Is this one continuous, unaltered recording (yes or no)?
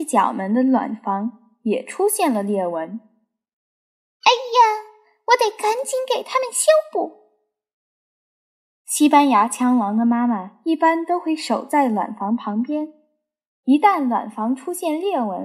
yes